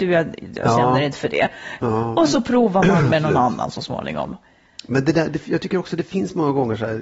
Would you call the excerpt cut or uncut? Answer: cut